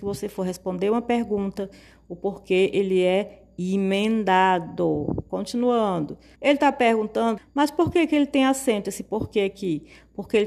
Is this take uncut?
no; 2 cuts; at 6.3 s, 7.4 s

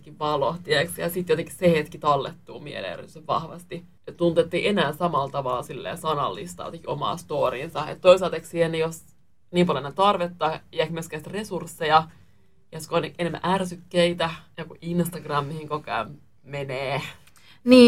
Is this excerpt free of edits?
yes; 0 cuts

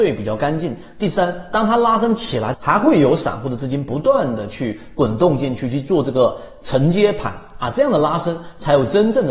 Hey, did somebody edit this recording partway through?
yes; 1 cut; at 2.5 s

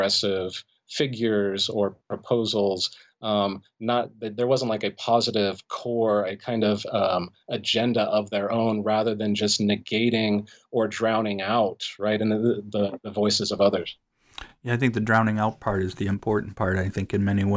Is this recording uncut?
yes; 0 cuts

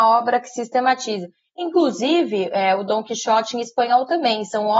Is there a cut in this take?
no; 0 cuts

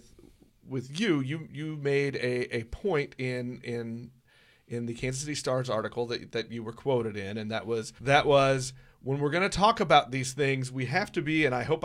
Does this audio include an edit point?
yes; 1 cut; at 8.0 s

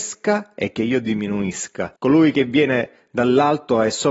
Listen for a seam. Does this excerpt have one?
yes; 1 cut; at 2.0 s

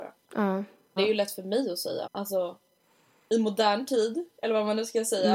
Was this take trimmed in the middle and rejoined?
yes; 2 cuts; at 1.0 s, 2.0 s

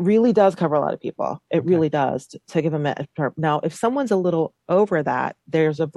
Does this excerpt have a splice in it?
no; 0 cuts

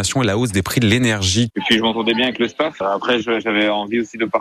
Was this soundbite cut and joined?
yes; 1 cut; at 1.5 s

